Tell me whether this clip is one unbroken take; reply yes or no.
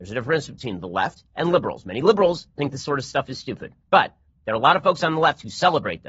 no